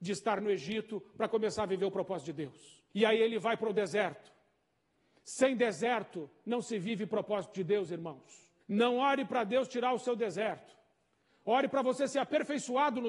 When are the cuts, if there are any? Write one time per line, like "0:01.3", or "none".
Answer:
0:02.9
0:08.6